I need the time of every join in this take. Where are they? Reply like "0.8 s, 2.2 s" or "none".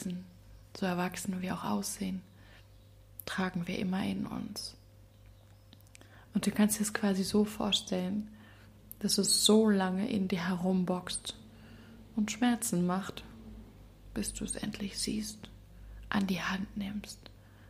6.2 s